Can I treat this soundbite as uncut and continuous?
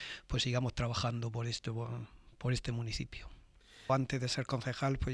no; 1 cut; at 3.9 s

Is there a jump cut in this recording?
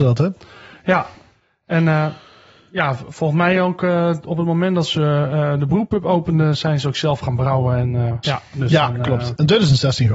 yes; 1 cut; at 8.2 s

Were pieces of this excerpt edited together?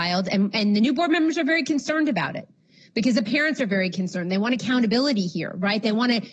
no; 0 cuts

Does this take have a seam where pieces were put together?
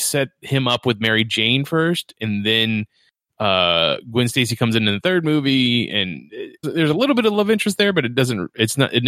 yes; 1 cut; at 6.6 s

